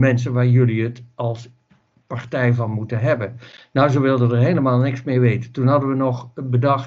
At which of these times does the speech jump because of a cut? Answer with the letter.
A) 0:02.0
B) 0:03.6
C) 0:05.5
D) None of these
D